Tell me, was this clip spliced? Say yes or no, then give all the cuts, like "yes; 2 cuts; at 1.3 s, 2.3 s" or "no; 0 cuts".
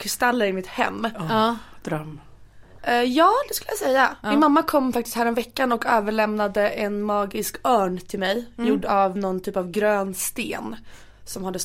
yes; 1 cut; at 2.8 s